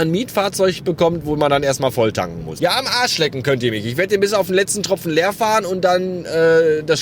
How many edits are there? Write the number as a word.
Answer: one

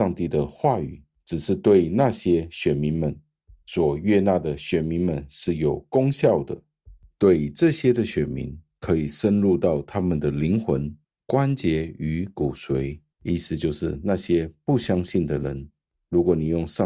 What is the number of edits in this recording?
two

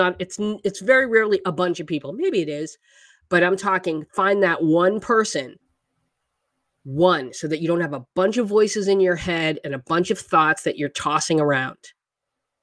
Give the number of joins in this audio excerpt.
zero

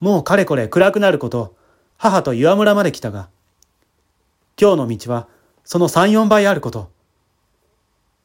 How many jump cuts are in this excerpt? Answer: one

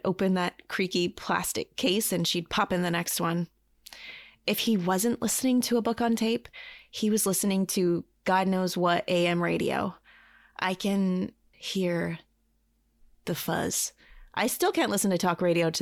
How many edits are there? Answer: one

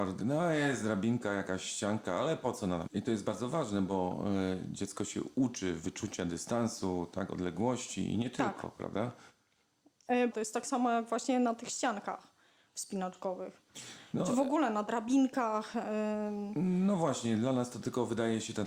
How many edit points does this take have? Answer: two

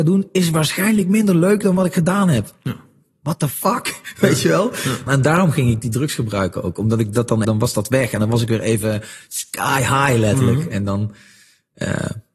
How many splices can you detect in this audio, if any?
two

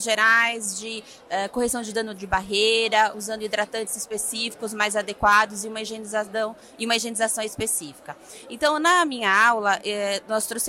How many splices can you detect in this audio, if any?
zero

